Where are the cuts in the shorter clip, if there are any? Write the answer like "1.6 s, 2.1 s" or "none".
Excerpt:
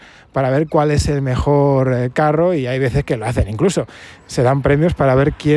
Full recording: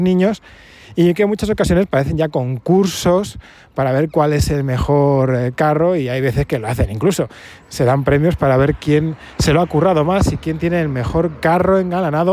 none